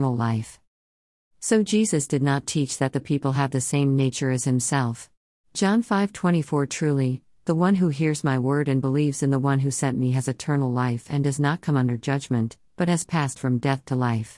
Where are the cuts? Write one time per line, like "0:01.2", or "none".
0:05.4
0:07.4